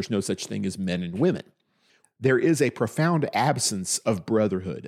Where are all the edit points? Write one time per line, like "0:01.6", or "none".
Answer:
0:02.0